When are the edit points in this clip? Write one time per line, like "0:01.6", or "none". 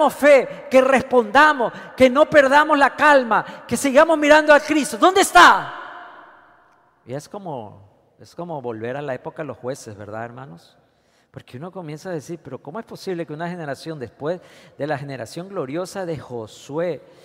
none

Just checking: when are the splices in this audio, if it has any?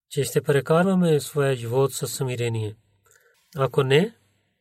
0:03.3

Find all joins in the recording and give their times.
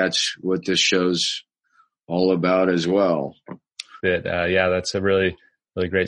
0:04.0

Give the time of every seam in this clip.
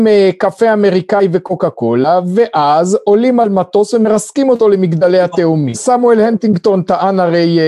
0:05.7

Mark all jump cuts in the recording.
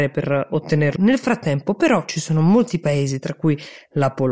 0:01.0

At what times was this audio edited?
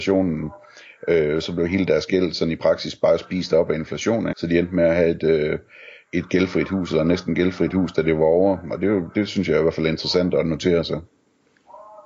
0:04.3

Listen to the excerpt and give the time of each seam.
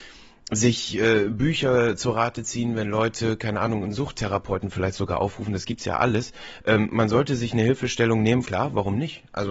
0:08.5

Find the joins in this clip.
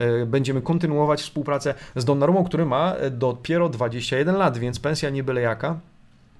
0:01.9

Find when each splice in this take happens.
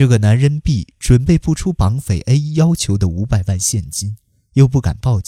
none

